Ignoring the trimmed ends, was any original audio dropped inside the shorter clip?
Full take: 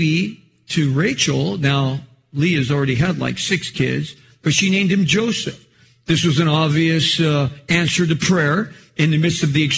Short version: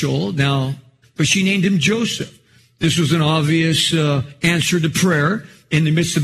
yes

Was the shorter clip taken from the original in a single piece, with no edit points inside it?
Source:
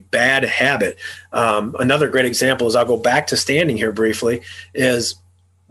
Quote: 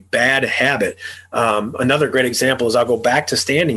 yes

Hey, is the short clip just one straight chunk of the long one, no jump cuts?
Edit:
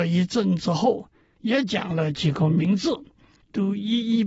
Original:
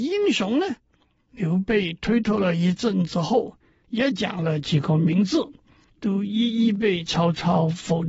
yes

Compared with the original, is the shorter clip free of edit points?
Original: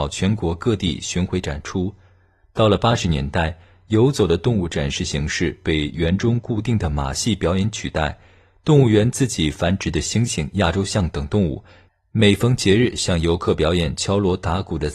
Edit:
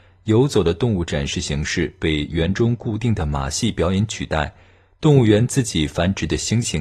yes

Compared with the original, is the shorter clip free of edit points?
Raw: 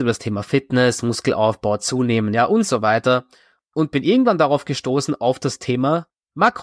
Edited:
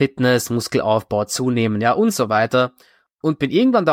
yes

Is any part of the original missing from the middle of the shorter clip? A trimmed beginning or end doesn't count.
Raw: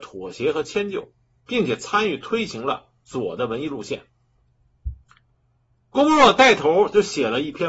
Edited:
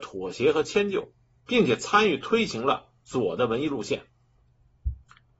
no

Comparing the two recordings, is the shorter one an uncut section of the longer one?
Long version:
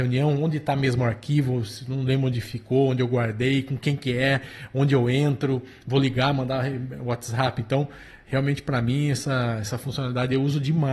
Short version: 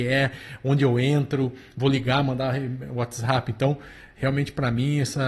yes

